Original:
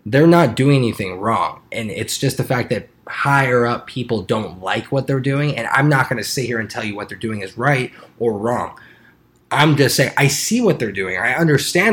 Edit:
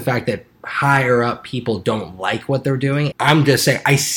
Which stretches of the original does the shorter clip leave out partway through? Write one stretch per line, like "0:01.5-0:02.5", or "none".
0:05.5-0:09.4

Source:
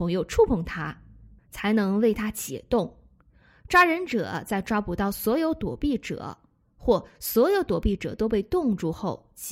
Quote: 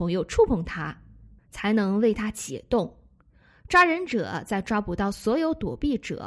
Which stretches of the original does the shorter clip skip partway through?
none

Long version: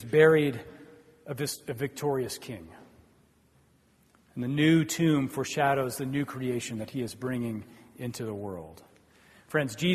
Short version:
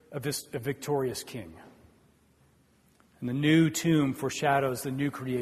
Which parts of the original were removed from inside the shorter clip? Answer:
none

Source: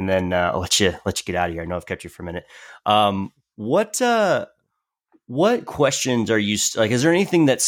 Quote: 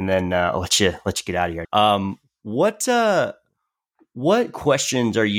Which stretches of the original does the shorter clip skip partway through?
0:01.6-0:02.8

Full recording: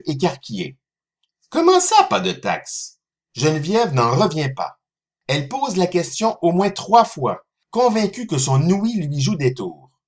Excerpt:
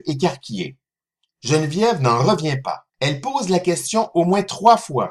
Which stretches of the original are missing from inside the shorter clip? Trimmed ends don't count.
0:01.3-0:03.3
0:04.8-0:05.2

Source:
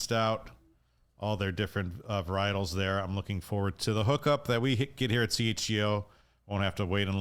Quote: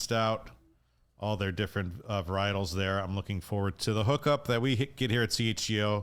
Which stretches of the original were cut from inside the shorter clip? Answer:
none

